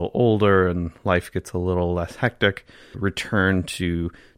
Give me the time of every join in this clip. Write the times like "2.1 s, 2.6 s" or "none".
2.9 s